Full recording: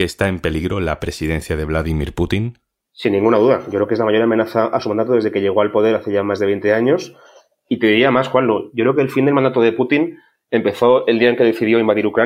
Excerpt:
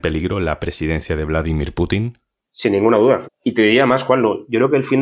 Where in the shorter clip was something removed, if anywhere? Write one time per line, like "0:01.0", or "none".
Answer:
0:03.2